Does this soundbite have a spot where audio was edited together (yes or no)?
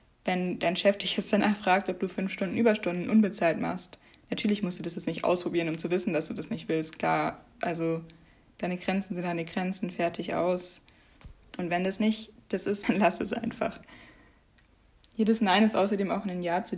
yes